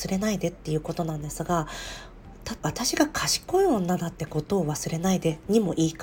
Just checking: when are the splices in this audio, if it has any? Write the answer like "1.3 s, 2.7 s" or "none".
2.6 s